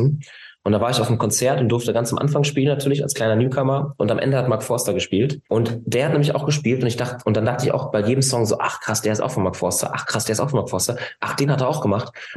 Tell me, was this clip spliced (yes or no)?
yes